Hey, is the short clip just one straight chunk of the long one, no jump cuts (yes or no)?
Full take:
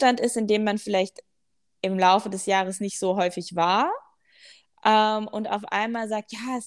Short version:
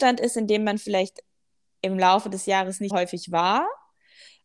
no